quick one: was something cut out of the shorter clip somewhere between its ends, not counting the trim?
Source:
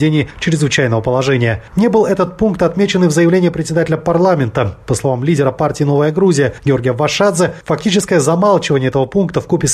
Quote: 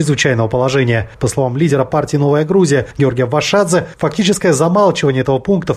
yes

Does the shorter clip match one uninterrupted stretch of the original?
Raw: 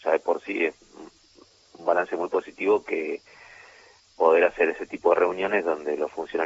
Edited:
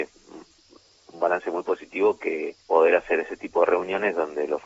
no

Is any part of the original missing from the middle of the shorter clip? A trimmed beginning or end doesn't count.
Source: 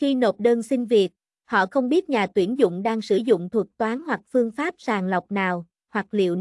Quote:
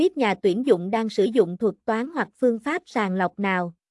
no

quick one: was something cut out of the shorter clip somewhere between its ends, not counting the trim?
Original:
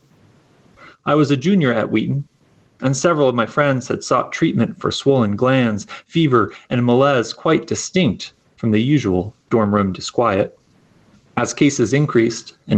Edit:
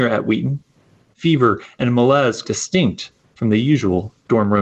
yes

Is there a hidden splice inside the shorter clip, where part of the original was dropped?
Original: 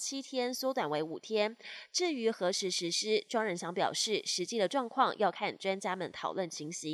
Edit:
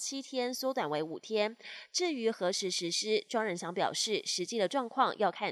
no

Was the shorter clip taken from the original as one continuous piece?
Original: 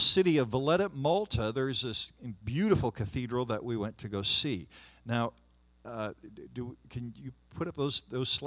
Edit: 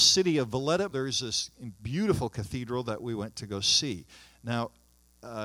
no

